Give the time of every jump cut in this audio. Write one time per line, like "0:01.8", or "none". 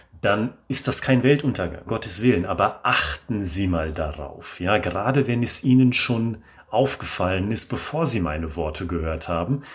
0:01.9